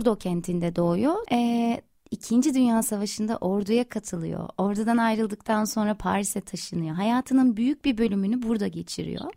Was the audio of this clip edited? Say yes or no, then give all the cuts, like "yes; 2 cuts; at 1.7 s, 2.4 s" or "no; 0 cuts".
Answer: yes; 1 cut; at 1.2 s